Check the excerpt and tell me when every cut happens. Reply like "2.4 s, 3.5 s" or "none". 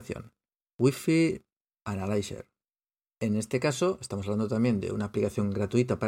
none